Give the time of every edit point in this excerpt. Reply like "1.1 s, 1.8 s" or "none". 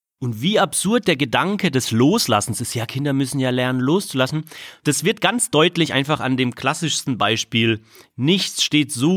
4.8 s